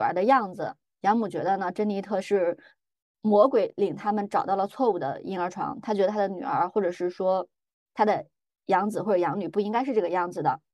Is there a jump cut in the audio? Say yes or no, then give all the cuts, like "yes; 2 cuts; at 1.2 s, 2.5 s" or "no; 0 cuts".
no; 0 cuts